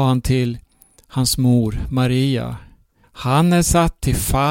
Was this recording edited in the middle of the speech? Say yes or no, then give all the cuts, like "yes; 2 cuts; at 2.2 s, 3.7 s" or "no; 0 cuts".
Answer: yes; 1 cut; at 3.0 s